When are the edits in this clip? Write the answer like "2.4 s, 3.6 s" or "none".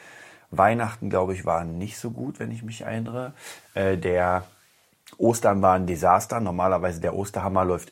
none